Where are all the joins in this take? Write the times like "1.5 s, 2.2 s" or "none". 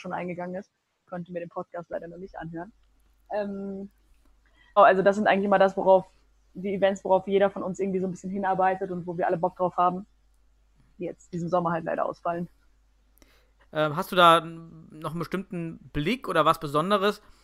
4.8 s, 13.6 s